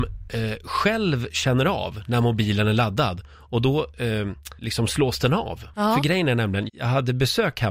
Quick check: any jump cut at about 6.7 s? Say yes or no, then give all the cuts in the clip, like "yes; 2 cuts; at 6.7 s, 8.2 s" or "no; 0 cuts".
yes; 1 cut; at 6.7 s